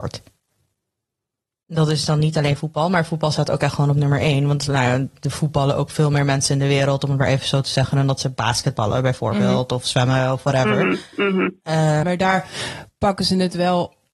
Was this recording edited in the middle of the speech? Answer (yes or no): yes